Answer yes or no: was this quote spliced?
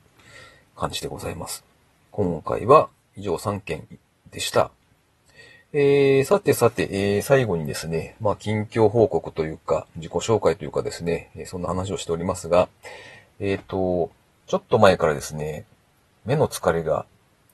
yes